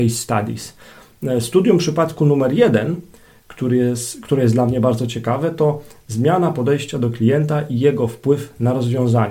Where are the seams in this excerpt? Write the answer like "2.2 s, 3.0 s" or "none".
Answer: none